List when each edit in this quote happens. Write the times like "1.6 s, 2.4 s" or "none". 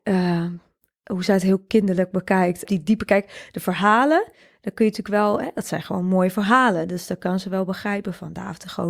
2.6 s